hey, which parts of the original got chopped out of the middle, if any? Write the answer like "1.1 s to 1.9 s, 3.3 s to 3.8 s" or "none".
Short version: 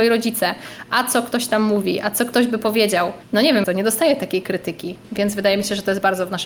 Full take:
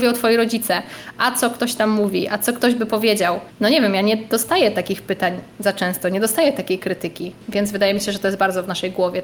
3.9 s to 6.0 s

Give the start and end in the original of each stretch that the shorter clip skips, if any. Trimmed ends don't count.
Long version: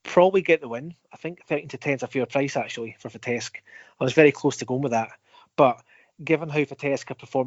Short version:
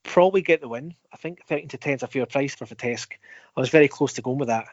2.5 s to 3.0 s

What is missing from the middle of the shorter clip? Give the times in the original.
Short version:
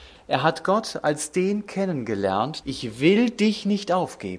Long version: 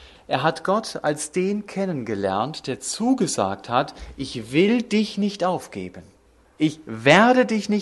2.6 s to 4.1 s

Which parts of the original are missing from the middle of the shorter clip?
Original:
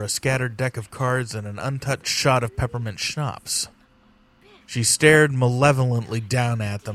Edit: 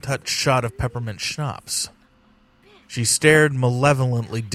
none

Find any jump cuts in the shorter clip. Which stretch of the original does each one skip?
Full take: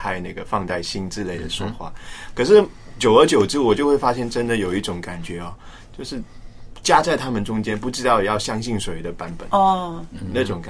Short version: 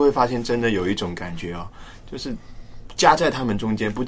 none

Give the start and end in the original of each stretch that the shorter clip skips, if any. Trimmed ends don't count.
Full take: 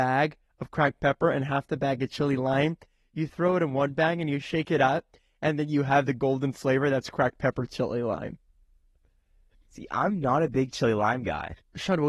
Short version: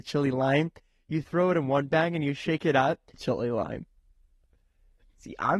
5.2 s to 7.7 s

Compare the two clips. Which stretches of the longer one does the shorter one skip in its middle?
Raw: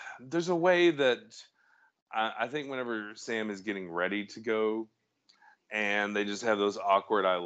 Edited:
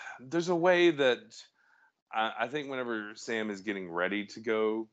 none

